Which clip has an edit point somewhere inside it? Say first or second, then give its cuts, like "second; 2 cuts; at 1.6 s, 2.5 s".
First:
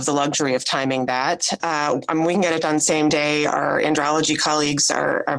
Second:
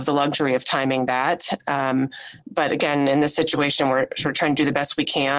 first; 1 cut; at 1.6 s